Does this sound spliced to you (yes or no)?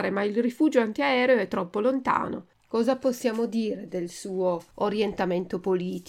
yes